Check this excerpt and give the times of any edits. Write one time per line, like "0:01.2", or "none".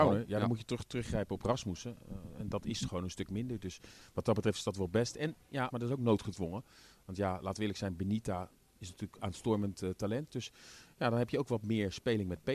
0:05.7
0:10.3